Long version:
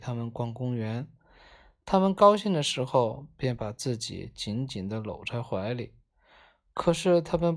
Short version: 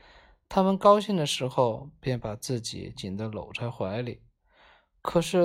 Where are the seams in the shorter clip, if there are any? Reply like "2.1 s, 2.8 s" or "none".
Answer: 2.9 s